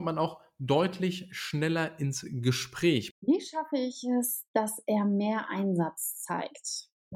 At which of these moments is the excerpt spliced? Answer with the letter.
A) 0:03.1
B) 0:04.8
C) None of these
A